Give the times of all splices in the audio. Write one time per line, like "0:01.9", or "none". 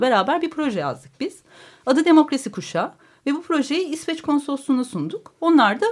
none